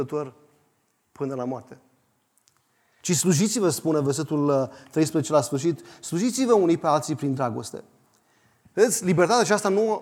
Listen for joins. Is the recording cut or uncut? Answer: cut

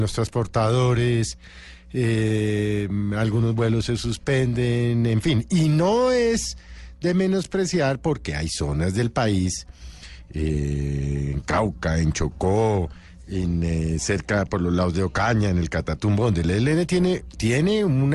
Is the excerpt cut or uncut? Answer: uncut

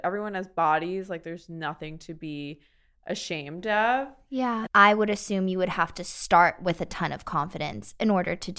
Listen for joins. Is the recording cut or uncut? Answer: cut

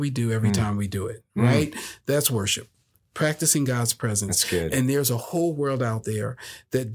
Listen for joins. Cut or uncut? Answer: uncut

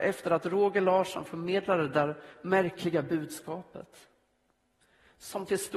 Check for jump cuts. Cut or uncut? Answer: uncut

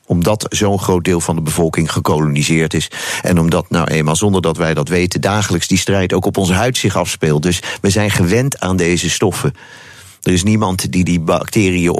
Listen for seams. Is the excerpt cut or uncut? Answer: uncut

